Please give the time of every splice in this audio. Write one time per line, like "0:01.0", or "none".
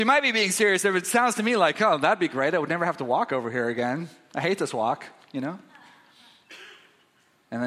none